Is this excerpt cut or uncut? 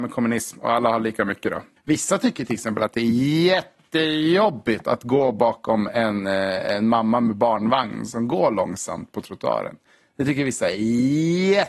cut